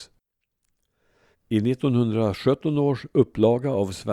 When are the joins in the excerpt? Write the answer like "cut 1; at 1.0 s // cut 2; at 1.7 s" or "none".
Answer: cut 1; at 1.3 s